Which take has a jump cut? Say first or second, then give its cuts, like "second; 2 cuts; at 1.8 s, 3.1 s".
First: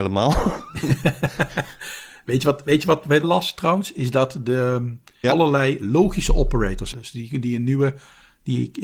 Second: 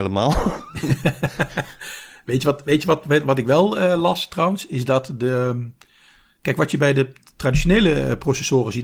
first; 3 cuts; at 3.2 s, 5.2 s, 6.9 s